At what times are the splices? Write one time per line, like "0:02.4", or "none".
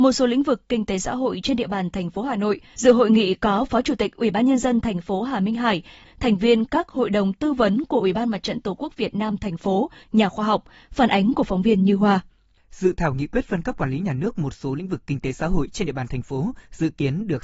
0:02.7
0:06.0
0:10.0